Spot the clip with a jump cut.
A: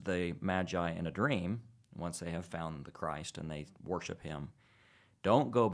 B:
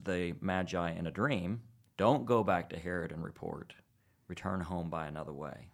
B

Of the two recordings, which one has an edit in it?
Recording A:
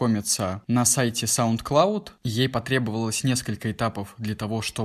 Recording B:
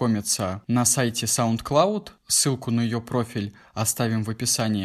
A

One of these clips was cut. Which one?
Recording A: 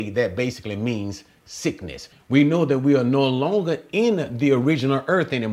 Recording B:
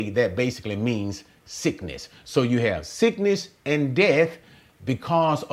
A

